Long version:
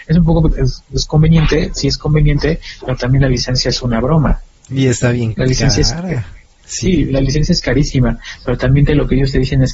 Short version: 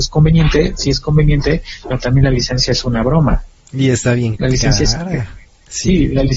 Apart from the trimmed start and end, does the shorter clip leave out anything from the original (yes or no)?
no